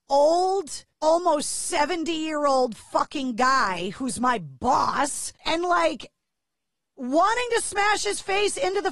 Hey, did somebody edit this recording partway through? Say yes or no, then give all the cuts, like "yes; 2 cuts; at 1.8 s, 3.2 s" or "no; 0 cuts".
yes; 2 cuts; at 0.9 s, 5.4 s